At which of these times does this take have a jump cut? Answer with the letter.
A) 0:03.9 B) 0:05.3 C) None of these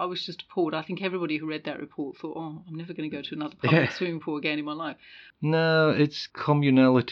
B